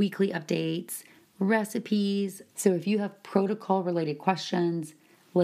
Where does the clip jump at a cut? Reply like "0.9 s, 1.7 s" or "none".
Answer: 2.5 s